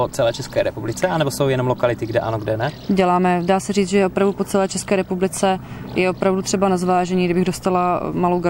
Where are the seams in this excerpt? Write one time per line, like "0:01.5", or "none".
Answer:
none